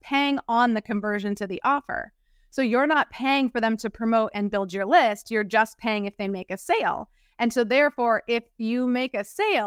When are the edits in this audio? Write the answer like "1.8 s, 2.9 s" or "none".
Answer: 4.3 s